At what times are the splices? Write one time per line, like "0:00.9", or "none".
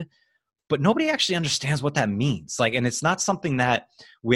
none